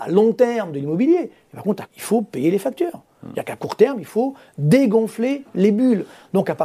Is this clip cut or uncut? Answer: cut